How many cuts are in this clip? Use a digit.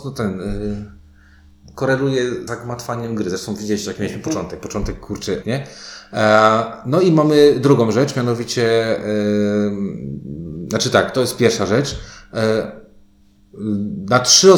2